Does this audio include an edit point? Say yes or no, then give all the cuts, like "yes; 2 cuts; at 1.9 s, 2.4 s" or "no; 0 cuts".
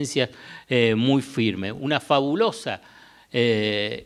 no; 0 cuts